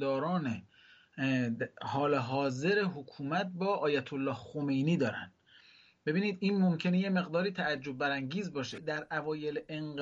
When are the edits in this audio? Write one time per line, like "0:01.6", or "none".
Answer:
0:08.8